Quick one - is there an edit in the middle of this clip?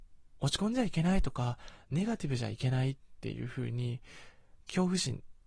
no; 0 cuts

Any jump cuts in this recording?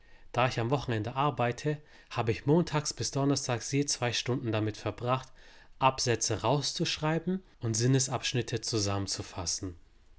no; 0 cuts

